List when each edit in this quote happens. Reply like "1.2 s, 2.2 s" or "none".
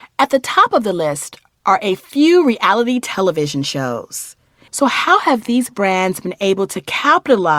4.7 s

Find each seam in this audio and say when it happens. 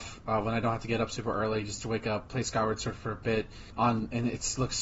3.7 s

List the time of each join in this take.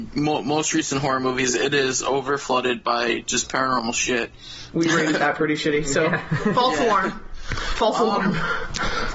4.7 s

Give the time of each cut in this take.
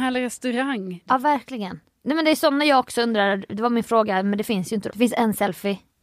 1.1 s, 4.9 s

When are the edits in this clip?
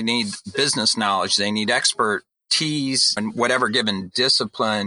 3.2 s

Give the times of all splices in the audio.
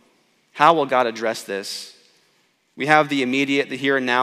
none

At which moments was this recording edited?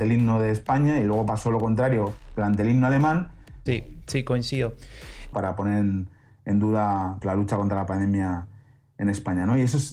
3.7 s, 5.3 s, 7.2 s

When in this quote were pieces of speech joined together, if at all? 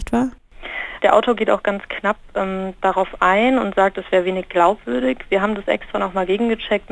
1.0 s

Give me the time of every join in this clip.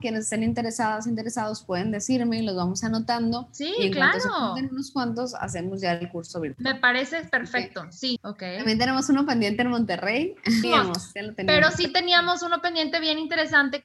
8.2 s, 10.6 s

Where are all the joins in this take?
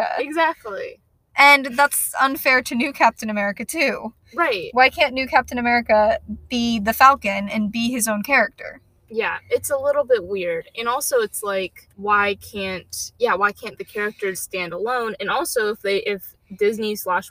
11.9 s, 14.3 s

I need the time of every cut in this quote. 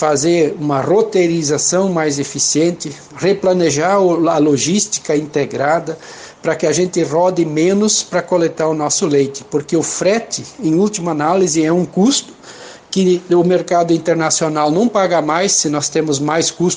none

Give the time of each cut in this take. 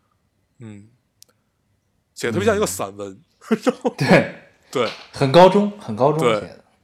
none

